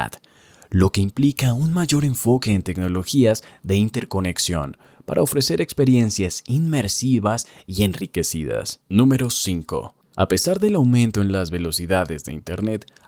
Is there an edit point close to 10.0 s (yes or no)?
yes